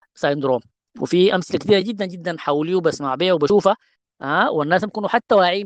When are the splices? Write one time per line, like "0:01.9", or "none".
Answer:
none